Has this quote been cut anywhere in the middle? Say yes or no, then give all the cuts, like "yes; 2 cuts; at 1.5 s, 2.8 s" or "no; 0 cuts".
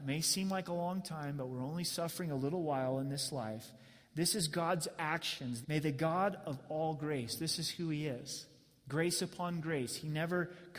yes; 1 cut; at 5.6 s